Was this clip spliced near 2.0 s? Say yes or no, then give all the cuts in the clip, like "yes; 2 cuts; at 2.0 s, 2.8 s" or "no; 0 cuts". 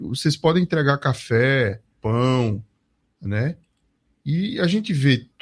yes; 1 cut; at 2.0 s